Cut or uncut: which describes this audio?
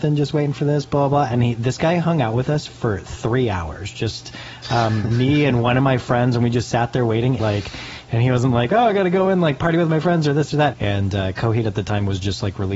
cut